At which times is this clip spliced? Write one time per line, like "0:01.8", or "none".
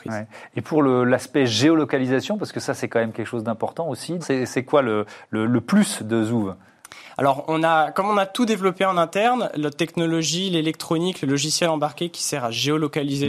0:04.2